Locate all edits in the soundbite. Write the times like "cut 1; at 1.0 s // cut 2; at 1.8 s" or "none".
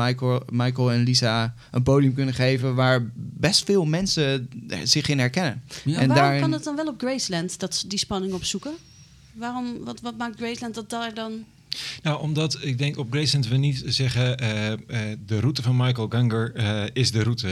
none